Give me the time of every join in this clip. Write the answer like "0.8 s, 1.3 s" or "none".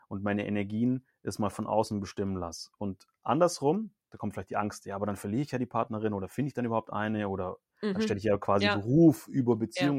none